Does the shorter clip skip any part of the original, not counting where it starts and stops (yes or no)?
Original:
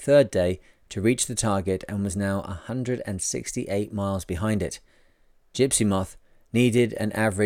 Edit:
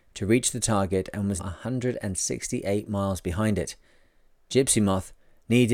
yes